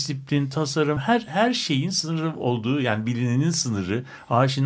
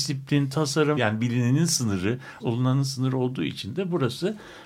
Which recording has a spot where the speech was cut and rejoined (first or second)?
second